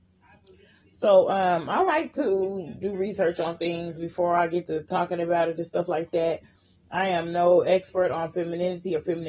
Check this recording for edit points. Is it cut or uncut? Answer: uncut